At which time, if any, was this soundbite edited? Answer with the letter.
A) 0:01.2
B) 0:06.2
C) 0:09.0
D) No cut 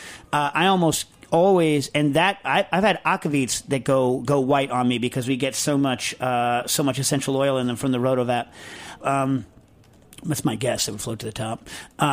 C